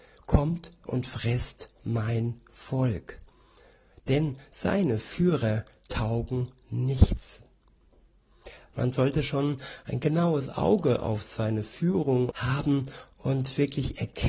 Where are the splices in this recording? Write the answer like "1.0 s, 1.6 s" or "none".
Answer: 8.7 s, 12.3 s